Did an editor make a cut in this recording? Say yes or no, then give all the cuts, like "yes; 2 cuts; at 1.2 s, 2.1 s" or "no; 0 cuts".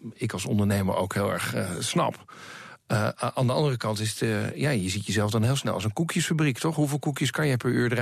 no; 0 cuts